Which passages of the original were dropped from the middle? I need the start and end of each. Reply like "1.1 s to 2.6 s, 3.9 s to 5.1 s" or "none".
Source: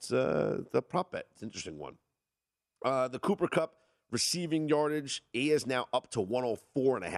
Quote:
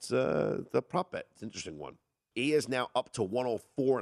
2.3 s to 5.3 s